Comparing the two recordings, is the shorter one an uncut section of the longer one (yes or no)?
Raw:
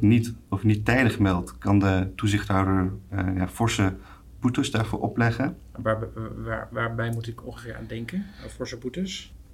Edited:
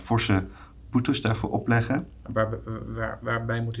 yes